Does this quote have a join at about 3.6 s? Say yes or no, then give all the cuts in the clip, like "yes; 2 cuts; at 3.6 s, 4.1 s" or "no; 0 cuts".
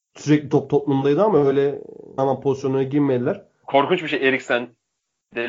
yes; 2 cuts; at 2.2 s, 3.6 s